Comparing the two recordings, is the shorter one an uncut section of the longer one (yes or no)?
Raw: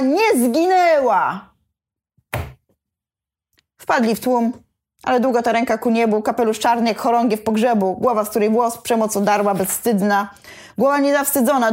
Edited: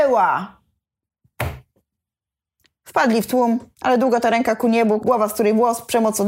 no